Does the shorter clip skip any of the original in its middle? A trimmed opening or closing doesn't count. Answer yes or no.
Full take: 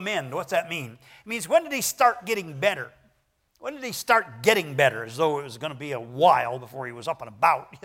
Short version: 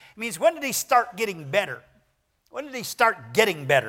no